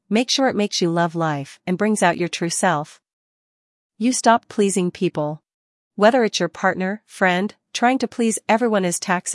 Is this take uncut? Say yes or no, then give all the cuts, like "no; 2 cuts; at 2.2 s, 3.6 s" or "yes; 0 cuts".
no; 2 cuts; at 5.9 s, 7.7 s